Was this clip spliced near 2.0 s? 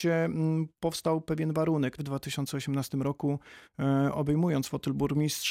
yes; 1 cut; at 2.0 s

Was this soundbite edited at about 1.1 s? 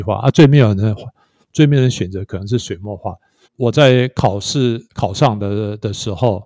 no; 2 cuts; at 3.4 s, 4.9 s

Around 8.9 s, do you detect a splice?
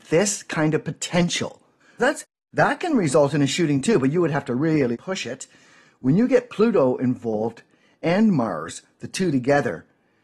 no; 2 cuts; at 2.0 s, 4.9 s

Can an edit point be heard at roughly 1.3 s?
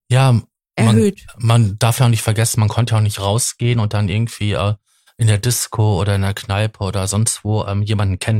no; 0 cuts

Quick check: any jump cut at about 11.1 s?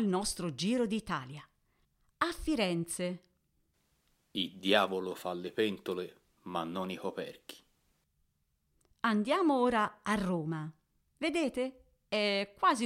yes; 1 cut; at 11.1 s

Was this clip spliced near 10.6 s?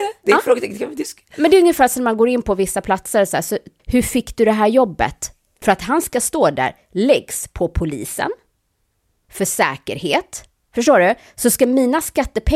no; 2 cuts; at 3.8 s, 5.6 s

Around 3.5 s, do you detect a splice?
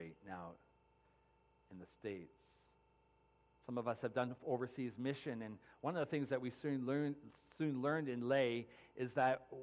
yes; 1 cut; at 3.5 s

